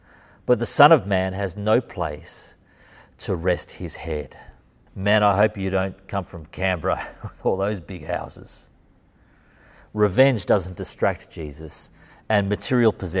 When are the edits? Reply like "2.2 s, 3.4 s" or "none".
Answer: 4.9 s